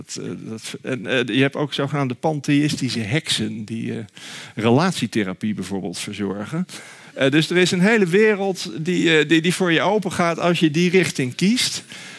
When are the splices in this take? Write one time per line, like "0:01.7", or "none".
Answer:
none